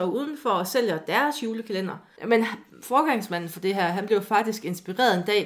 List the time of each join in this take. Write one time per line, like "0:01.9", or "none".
0:02.2